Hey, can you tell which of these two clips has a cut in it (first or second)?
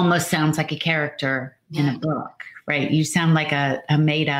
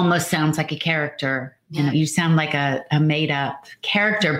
second